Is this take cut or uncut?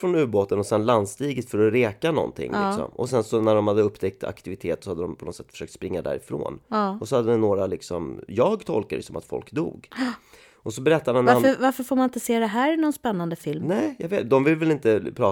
uncut